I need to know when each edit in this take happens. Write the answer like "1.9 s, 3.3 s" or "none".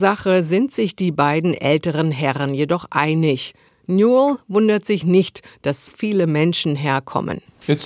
3.7 s, 5.9 s